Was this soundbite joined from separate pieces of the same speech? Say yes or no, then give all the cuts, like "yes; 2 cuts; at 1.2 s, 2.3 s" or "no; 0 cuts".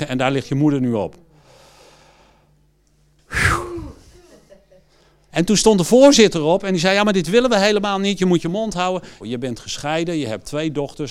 yes; 2 cuts; at 5.3 s, 9.2 s